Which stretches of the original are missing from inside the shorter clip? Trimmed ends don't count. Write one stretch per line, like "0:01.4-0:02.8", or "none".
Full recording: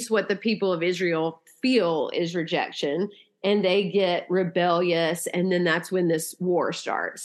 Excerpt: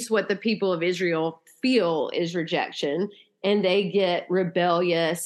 none

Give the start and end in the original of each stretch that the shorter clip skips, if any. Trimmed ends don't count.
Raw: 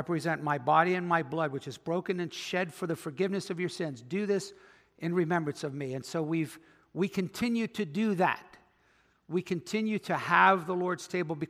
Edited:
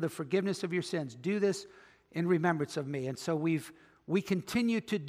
none

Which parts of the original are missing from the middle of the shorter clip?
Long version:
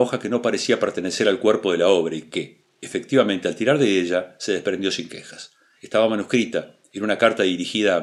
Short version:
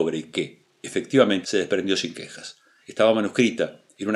0:03.4-0:04.4

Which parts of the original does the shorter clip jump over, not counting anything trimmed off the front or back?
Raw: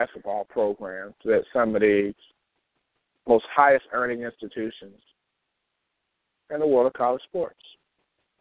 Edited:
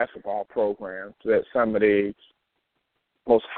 none

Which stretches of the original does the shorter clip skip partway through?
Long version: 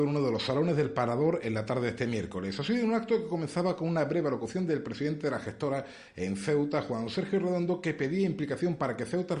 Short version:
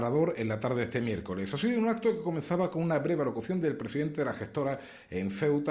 none

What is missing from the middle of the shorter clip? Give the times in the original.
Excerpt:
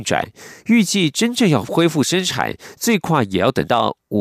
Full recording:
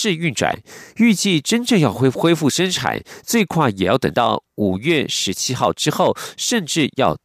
0:01.9-0:02.1

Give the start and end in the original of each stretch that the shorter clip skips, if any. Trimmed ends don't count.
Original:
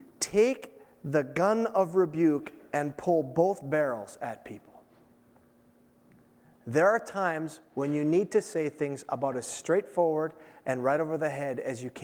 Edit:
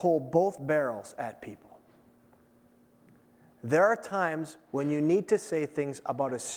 none

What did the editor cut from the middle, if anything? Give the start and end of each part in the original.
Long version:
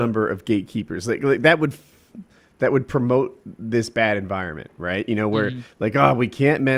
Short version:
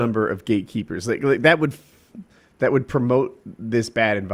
none

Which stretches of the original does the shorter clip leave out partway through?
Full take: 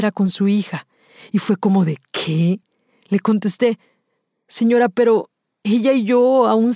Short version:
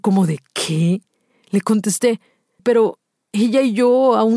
0:04.2-0:04.9

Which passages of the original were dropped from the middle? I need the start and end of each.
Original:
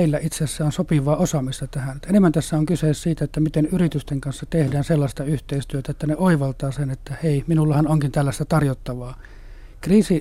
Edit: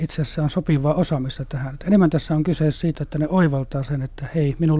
0:03.2-0:05.8

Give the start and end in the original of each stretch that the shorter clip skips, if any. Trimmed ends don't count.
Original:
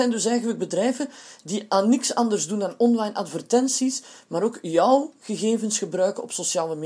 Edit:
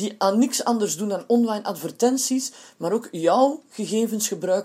none

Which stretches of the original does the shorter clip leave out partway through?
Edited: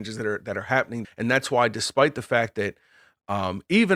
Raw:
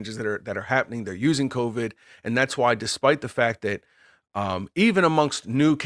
0:01.0-0:02.1

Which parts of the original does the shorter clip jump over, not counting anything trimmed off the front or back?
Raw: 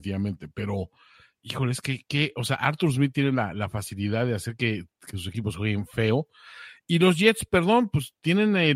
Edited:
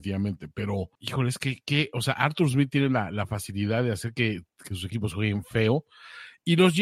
0:01.0-0:01.4

